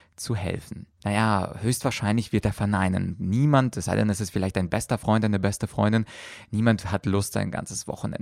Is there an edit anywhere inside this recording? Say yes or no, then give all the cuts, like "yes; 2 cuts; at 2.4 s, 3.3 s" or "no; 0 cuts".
yes; 1 cut; at 1.0 s